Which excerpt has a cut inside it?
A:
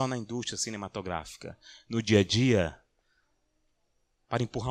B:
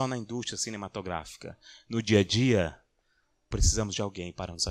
B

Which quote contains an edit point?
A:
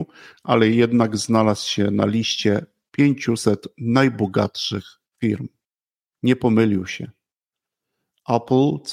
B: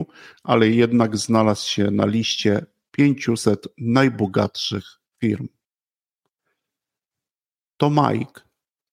A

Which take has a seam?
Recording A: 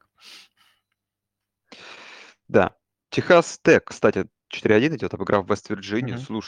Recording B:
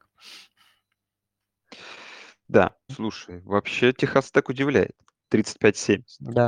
B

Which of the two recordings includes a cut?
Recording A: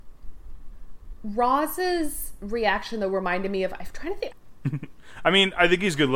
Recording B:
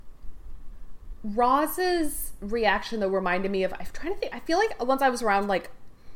A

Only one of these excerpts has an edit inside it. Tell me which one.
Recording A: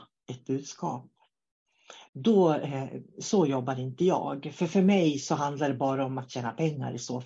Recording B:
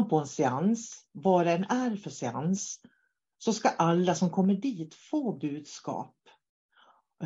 A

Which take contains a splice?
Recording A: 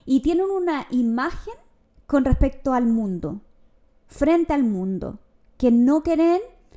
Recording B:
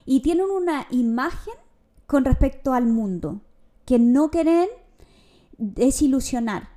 B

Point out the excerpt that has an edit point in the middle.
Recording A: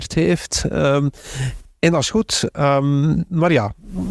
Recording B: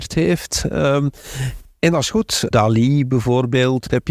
B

